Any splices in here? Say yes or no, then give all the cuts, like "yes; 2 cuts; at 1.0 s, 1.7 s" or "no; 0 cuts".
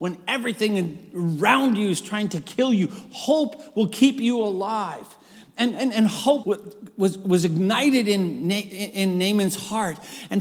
yes; 1 cut; at 6.4 s